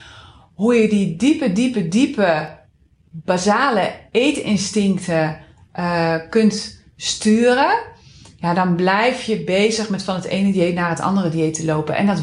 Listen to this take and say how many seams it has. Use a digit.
0